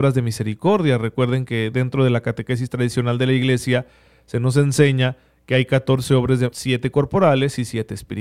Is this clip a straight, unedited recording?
no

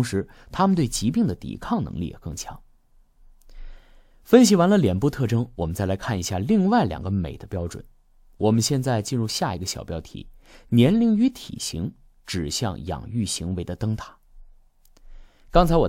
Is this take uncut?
yes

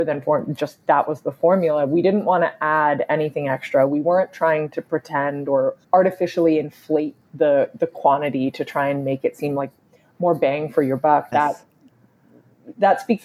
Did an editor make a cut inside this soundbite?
yes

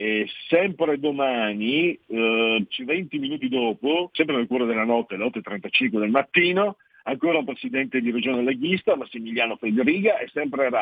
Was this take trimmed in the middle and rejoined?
yes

